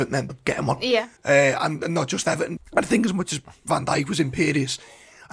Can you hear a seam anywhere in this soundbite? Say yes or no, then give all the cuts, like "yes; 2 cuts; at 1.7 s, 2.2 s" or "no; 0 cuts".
yes; 2 cuts; at 1.2 s, 2.6 s